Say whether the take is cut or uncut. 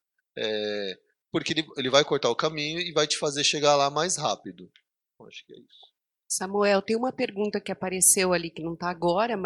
uncut